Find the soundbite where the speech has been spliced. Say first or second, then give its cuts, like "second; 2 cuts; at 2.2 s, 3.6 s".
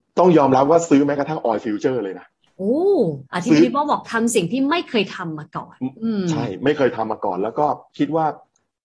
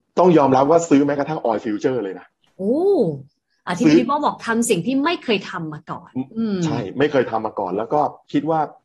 first; 1 cut; at 3.3 s